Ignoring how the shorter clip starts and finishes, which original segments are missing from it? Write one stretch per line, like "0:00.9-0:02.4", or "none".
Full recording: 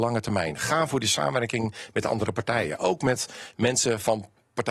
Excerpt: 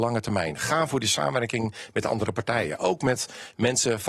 none